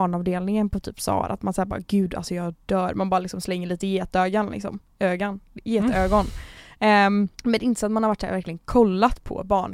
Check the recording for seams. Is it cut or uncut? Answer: cut